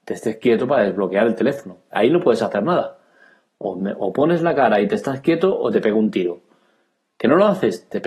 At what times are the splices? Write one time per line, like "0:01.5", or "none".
none

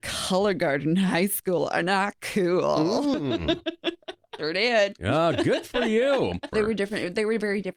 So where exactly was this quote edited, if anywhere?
0:04.4
0:06.5

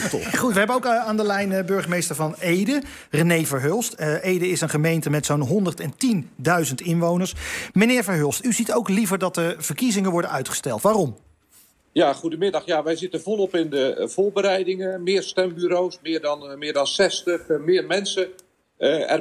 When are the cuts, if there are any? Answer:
none

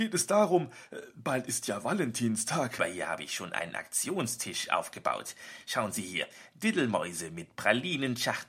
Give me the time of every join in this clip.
0:02.8

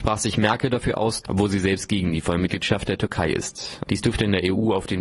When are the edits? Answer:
0:01.2
0:03.8

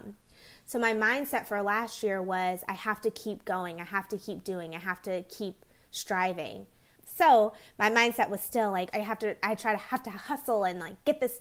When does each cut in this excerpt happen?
0:07.0
0:08.9

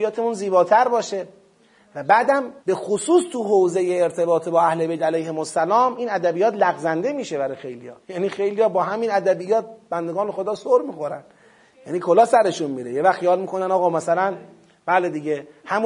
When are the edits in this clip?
0:02.6
0:08.0

